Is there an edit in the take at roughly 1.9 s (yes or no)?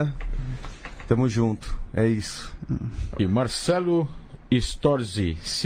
no